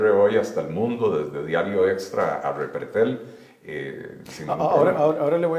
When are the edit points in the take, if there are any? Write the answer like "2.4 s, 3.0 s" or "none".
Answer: 4.3 s